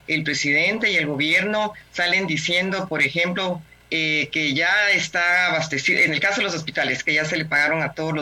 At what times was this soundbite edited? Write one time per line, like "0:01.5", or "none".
0:07.0